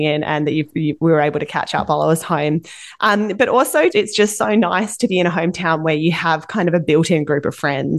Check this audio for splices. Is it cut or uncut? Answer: cut